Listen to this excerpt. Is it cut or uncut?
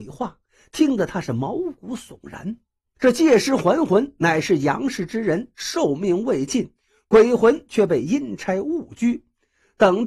cut